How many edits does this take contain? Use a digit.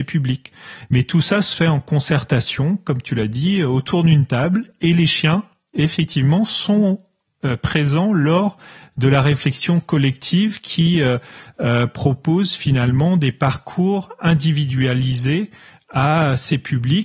0